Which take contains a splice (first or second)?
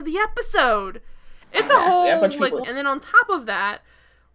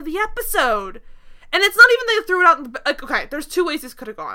first